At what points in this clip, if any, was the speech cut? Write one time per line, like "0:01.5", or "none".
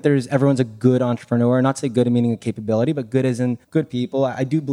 0:03.6